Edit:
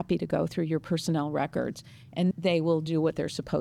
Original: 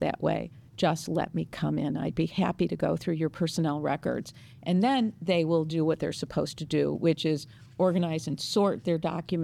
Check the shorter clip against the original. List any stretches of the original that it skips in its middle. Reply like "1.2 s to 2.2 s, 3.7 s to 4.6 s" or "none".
4.8 s to 5.1 s